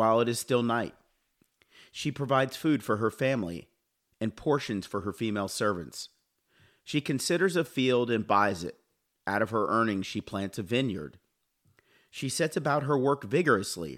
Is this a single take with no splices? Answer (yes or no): yes